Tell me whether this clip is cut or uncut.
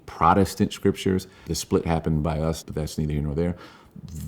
cut